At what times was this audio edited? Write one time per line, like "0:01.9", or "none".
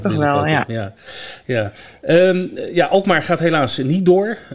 none